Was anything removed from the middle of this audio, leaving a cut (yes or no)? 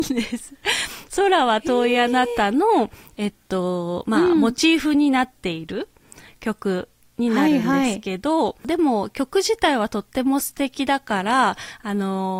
no